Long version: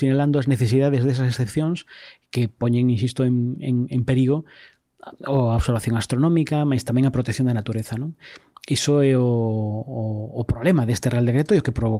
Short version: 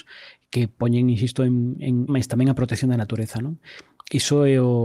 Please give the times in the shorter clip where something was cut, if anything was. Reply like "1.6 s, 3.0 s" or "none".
2.1 s